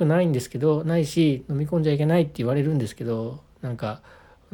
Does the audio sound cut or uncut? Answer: uncut